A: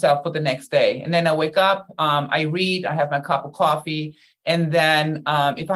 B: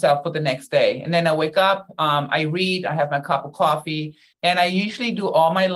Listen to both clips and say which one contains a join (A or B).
B